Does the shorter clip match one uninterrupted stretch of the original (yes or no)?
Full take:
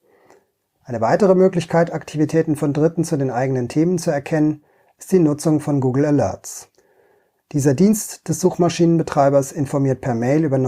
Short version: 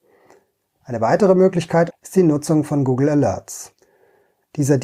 no